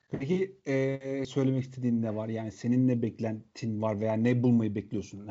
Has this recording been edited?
yes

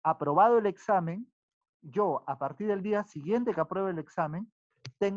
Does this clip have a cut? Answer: no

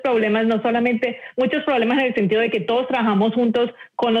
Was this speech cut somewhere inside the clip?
no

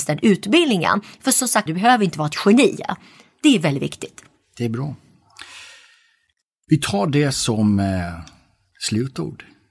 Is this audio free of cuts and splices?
no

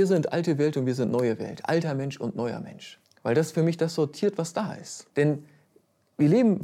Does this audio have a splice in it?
yes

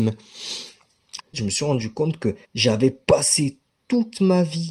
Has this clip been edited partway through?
yes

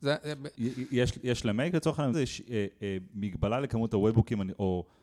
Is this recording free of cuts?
no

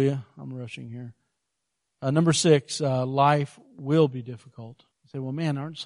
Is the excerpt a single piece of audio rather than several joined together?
no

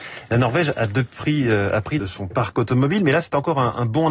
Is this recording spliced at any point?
yes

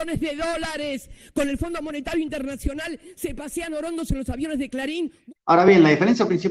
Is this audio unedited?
no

